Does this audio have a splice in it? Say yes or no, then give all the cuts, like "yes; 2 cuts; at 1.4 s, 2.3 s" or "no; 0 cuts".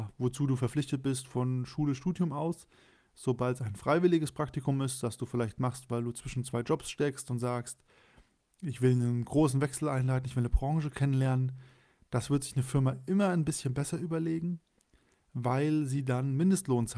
no; 0 cuts